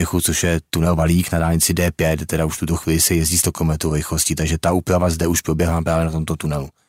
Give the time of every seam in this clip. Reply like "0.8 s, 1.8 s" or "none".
none